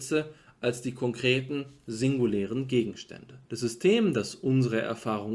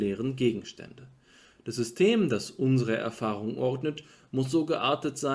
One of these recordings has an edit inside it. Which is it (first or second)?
first